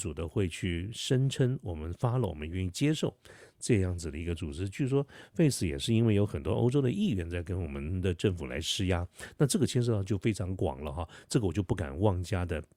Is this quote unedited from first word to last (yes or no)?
yes